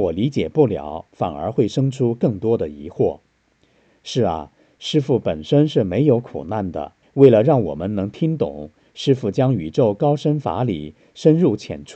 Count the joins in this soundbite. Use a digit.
1